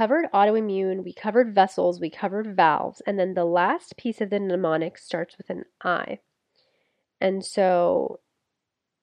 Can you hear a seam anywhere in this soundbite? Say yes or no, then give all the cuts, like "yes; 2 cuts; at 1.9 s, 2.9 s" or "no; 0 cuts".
no; 0 cuts